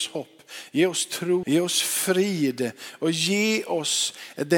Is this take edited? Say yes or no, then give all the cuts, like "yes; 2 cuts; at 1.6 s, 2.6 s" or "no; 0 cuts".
yes; 1 cut; at 1.4 s